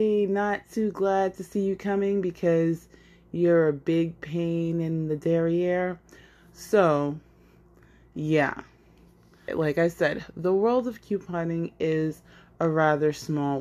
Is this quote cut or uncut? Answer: cut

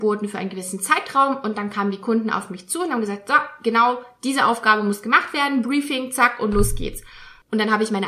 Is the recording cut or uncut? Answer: uncut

